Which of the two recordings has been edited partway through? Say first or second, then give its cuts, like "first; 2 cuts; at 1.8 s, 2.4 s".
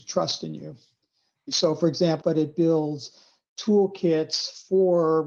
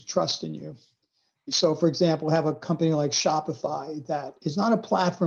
first; 1 cut; at 2.2 s